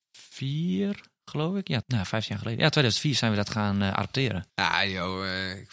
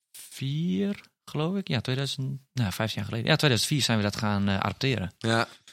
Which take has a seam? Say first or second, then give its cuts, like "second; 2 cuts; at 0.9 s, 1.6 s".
first; 2 cuts; at 1.8 s, 4.5 s